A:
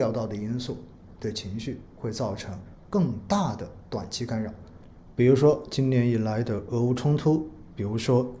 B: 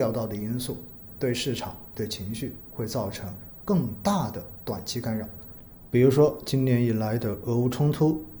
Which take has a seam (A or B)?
A